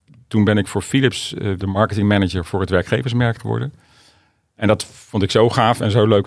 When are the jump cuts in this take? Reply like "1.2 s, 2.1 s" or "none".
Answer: 1.6 s